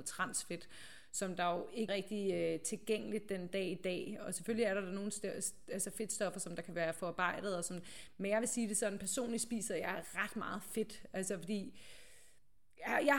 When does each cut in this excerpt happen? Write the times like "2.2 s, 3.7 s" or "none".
1.9 s